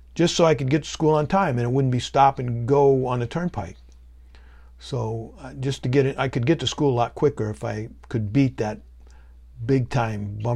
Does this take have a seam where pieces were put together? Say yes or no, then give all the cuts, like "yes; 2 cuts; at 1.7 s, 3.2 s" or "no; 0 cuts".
no; 0 cuts